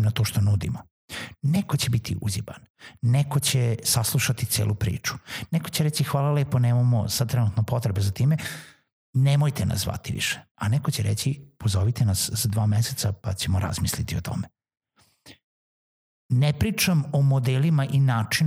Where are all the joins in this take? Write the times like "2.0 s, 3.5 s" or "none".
none